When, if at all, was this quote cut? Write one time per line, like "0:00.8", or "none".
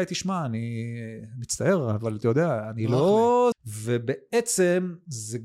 0:03.5